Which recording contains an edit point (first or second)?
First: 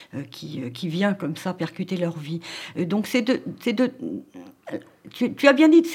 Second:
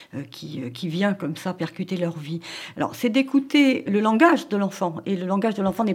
second